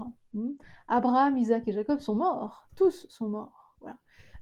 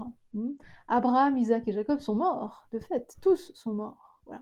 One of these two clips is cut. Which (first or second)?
first